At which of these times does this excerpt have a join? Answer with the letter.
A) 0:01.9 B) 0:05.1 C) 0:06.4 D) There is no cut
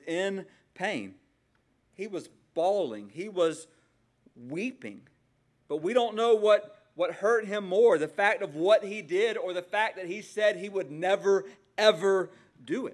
A